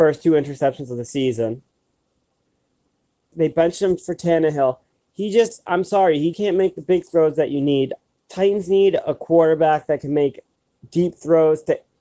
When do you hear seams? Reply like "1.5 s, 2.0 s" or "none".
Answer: 3.3 s, 6.3 s